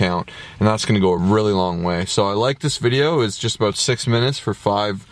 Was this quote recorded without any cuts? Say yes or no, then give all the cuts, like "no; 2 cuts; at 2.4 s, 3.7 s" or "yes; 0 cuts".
yes; 0 cuts